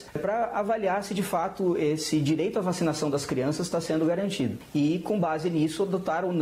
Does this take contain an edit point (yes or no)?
no